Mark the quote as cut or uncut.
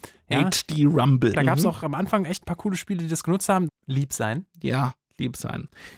cut